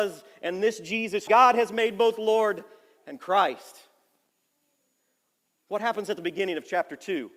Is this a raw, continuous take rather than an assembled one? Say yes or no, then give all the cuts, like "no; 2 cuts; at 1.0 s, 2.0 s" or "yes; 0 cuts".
no; 1 cut; at 1.3 s